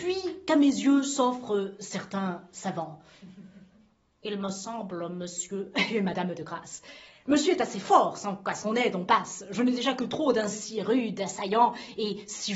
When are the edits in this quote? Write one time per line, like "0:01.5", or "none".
none